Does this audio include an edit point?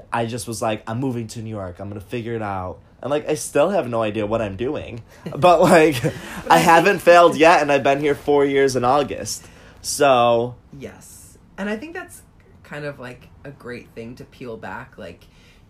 no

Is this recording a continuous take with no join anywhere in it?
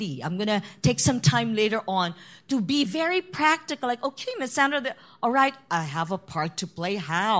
yes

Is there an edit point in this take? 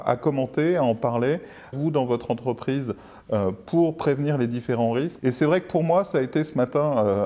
yes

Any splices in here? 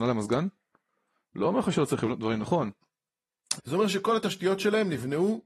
yes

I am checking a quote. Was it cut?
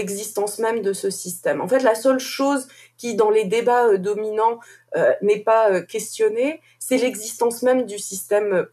no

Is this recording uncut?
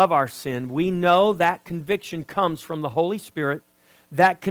yes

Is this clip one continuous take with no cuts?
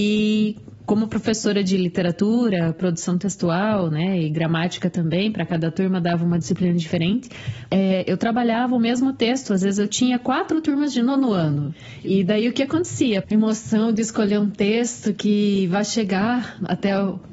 no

